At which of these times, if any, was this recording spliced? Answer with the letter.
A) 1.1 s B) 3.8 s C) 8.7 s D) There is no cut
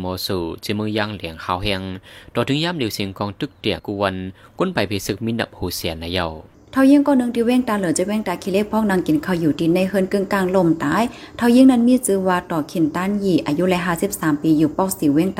B